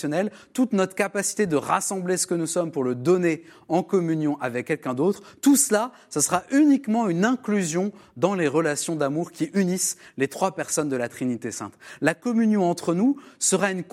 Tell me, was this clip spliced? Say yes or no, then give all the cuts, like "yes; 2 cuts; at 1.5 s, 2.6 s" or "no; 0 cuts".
no; 0 cuts